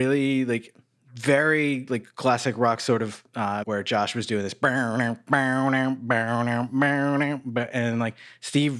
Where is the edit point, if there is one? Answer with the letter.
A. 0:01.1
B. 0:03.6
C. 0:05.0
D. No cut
B